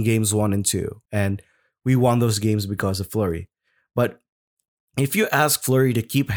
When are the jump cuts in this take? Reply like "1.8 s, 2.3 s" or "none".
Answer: 1.0 s